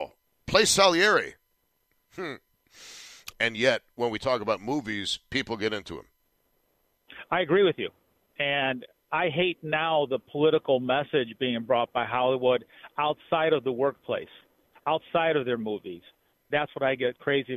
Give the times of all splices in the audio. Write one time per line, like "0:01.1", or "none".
0:03.3
0:16.3